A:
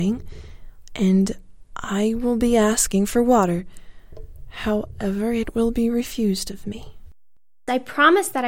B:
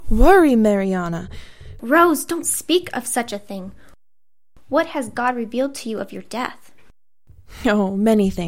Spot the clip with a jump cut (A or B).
B